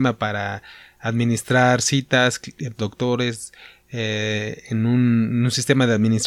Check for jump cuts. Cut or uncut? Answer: cut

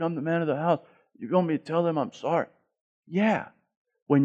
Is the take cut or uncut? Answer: uncut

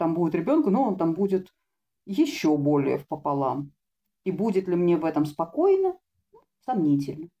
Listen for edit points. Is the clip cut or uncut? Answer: uncut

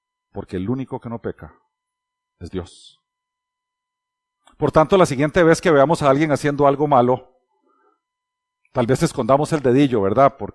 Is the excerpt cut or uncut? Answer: uncut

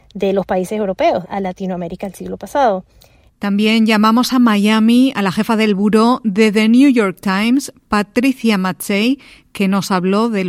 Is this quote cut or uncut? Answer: cut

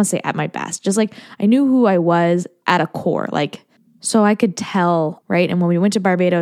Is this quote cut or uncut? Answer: cut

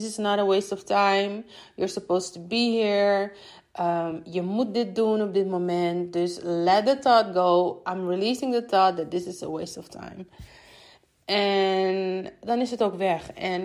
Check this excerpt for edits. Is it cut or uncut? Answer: uncut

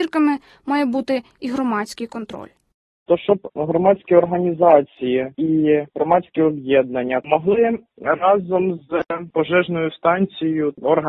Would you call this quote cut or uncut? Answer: uncut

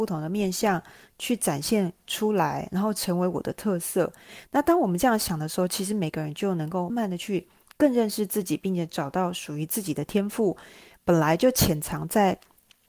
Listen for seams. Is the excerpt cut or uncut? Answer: cut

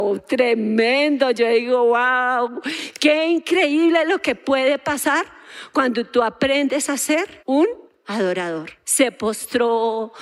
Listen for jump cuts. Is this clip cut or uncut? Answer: cut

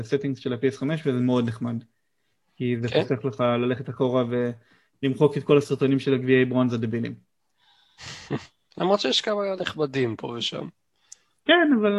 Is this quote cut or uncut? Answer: uncut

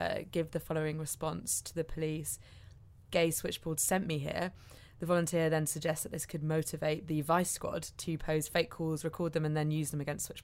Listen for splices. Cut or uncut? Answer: uncut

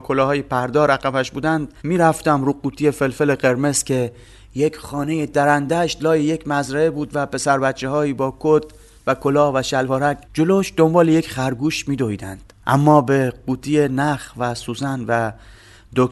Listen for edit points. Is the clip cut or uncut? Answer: cut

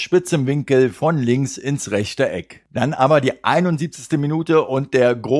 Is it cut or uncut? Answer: uncut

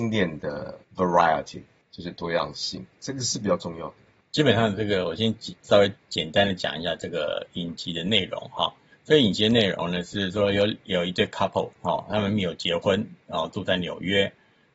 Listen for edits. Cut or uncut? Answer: uncut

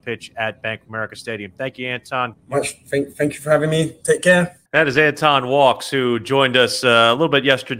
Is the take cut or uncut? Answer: cut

